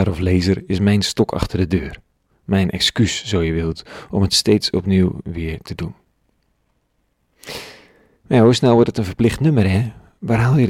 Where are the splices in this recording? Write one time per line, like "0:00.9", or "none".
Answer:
none